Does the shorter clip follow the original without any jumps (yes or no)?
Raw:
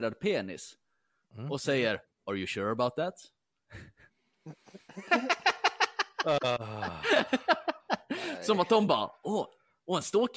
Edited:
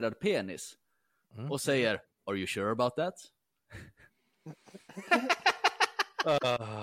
yes